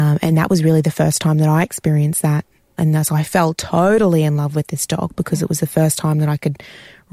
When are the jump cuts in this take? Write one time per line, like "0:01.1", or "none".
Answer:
0:02.8